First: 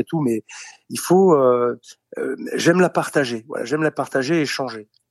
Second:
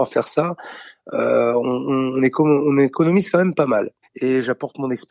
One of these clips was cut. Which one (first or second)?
second